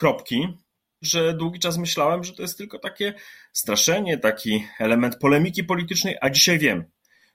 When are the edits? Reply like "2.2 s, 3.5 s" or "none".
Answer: 1.0 s